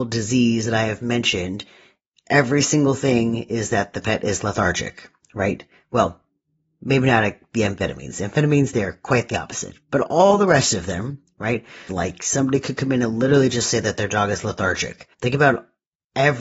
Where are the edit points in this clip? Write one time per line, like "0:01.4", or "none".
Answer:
0:11.9
0:15.1